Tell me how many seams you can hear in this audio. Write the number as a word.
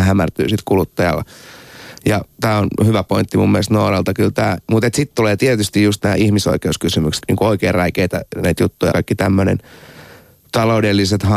two